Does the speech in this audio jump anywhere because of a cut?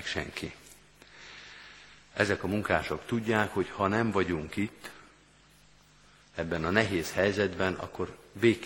no; 0 cuts

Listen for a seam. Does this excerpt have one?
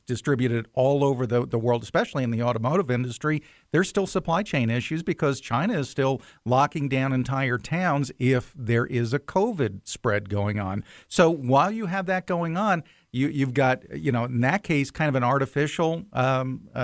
no; 0 cuts

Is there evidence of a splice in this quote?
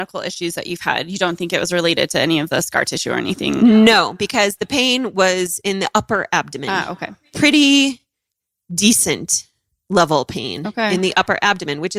no; 0 cuts

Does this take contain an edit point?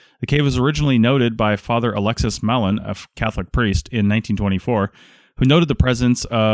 no; 0 cuts

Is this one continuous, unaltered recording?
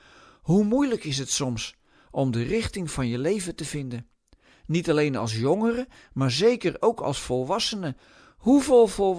yes; 0 cuts

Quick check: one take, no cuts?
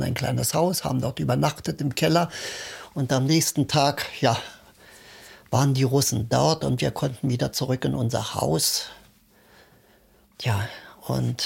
yes; 0 cuts

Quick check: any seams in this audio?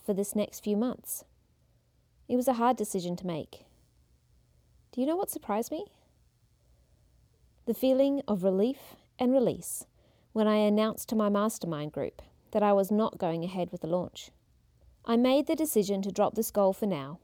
yes; 1 cut; at 14.9 s

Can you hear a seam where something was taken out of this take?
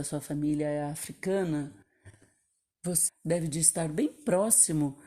yes; 1 cut; at 3.1 s

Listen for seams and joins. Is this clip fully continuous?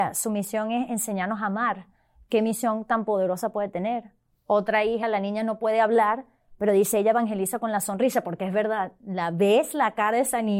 yes; 0 cuts

